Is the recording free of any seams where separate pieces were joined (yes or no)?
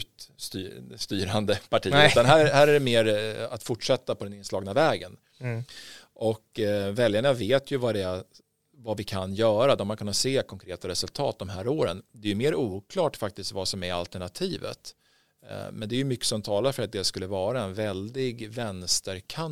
yes